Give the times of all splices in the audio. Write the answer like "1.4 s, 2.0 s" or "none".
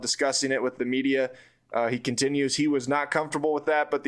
none

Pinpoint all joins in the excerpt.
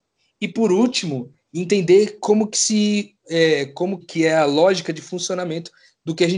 4.0 s

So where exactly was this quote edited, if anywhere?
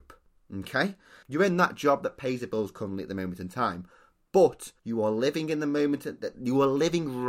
1.2 s, 4.8 s

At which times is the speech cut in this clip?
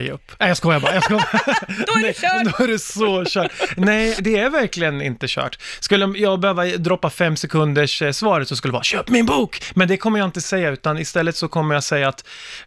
4.2 s

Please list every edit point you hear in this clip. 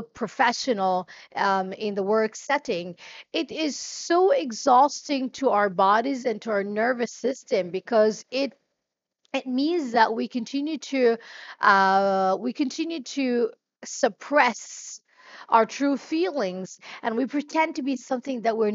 1.8 s

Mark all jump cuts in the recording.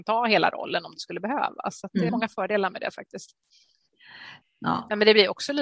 2.1 s, 4.4 s

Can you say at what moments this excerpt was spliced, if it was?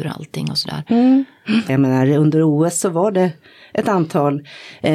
1.7 s

